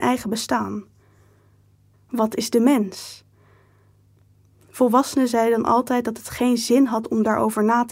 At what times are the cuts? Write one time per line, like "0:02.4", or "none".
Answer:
0:01.9